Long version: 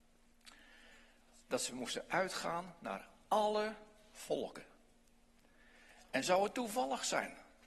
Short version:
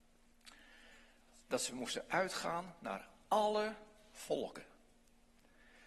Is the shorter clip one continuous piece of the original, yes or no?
yes